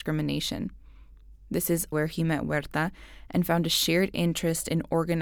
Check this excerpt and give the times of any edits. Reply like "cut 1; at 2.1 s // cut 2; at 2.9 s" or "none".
cut 1; at 1.9 s